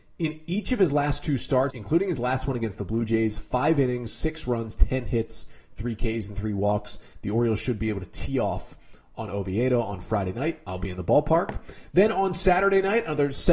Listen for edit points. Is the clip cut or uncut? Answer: cut